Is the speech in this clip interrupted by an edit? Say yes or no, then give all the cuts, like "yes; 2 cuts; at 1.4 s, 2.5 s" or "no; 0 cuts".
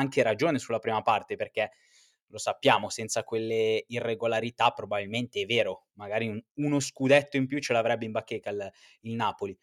no; 0 cuts